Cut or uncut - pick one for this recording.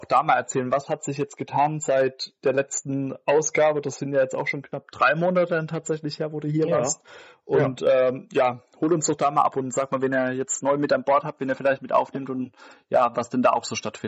uncut